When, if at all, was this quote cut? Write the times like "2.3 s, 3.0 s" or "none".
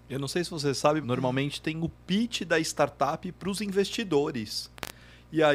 1.0 s